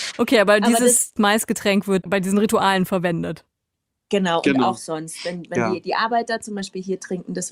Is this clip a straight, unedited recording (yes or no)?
yes